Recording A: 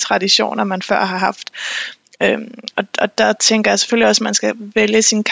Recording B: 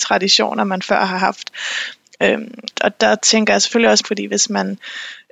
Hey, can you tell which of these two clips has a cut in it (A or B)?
B